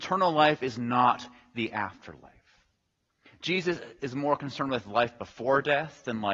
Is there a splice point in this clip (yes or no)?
no